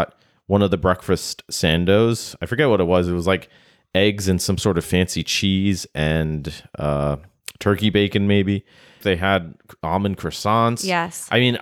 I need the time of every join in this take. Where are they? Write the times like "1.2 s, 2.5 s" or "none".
9.0 s